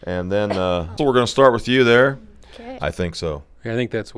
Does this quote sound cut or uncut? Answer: cut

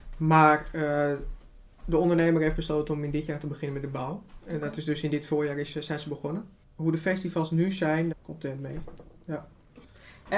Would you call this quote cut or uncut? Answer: cut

